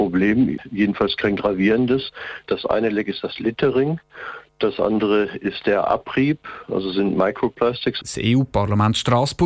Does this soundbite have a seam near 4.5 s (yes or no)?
no